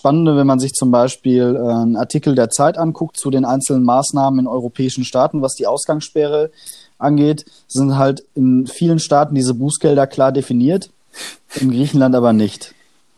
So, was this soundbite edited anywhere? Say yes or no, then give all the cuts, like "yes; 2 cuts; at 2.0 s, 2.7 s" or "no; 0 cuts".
no; 0 cuts